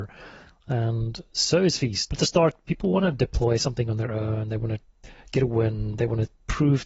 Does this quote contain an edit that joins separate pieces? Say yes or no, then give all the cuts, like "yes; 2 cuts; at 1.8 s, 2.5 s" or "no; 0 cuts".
yes; 1 cut; at 2.1 s